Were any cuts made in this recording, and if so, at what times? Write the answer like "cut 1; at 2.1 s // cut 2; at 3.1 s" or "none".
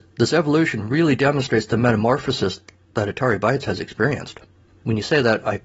none